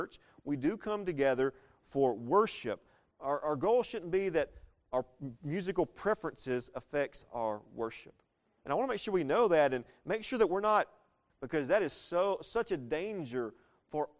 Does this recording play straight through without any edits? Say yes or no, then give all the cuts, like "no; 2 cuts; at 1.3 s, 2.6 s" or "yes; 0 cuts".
no; 3 cuts; at 3.1 s, 8.6 s, 11.3 s